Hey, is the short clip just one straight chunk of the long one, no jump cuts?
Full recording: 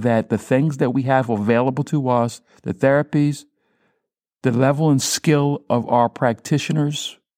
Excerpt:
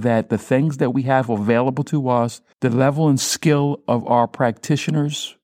no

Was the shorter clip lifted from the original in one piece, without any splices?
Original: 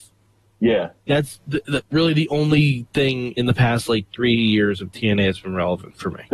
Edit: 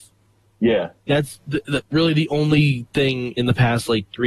yes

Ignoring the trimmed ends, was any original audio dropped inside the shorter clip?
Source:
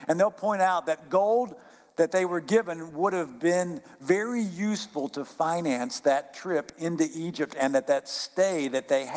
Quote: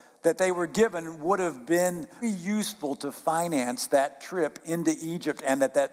yes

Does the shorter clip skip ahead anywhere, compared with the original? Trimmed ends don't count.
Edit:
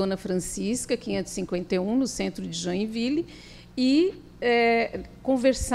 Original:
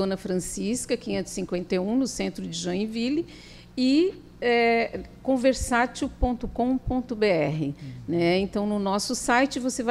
no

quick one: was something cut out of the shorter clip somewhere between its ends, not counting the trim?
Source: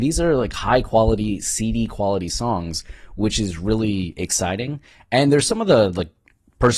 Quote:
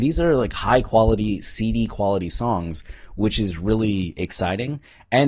no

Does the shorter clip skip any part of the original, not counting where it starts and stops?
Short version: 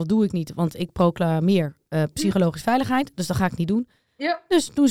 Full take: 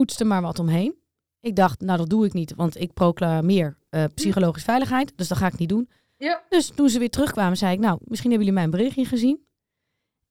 no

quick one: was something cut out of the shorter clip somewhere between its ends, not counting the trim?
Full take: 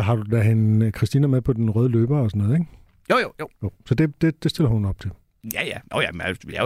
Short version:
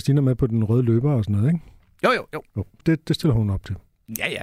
yes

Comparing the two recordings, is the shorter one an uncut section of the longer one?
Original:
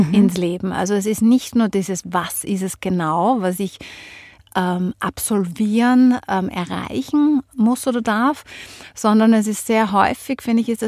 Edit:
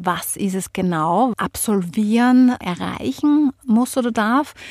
no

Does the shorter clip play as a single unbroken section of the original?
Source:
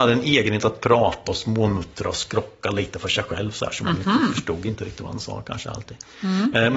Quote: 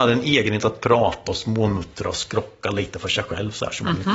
yes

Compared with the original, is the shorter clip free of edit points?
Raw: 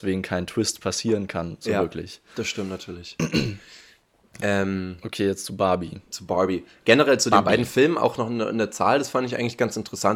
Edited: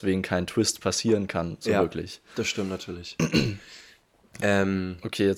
yes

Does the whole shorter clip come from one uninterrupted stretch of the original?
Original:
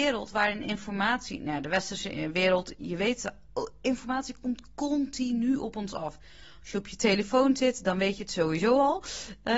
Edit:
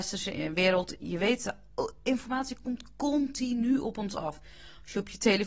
yes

